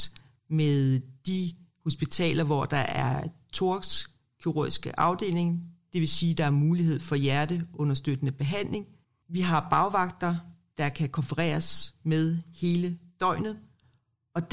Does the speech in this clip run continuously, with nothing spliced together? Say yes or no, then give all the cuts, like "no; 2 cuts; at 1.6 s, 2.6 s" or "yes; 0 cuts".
no; 1 cut; at 9.2 s